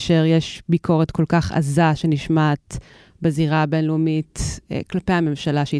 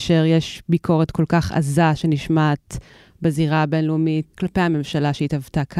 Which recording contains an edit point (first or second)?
second